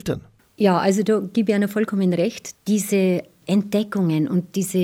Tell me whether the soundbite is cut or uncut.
cut